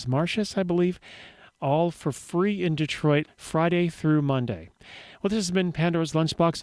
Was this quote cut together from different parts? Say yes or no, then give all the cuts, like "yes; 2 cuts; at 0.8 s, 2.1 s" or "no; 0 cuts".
yes; 1 cut; at 3.3 s